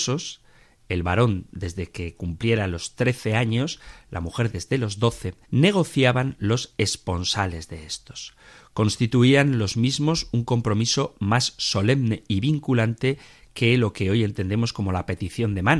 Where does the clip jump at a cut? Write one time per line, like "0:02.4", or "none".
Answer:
0:05.4